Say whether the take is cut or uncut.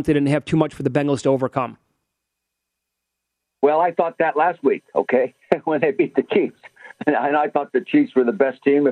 uncut